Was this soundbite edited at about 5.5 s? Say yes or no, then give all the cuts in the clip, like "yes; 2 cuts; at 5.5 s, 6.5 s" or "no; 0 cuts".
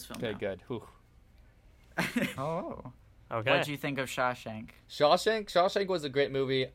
no; 1 cut; at 2.4 s